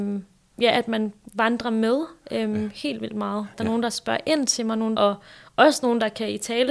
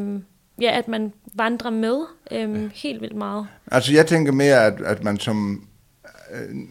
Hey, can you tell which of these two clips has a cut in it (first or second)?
first